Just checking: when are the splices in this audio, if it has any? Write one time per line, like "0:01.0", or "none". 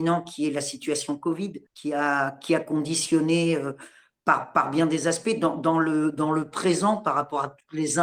0:01.7